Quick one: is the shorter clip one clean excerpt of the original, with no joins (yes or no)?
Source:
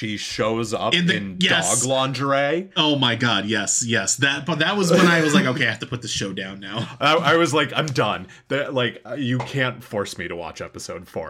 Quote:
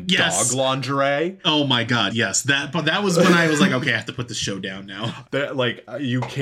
no